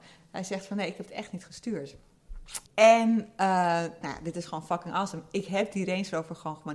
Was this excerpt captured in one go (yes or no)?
no